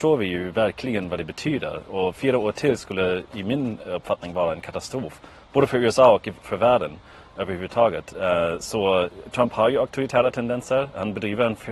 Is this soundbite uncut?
yes; 0 cuts

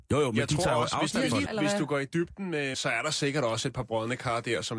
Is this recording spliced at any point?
yes; 2 cuts; at 1.5 s, 2.7 s

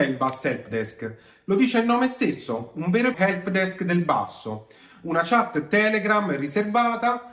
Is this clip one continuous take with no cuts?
no; 1 cut; at 3.1 s

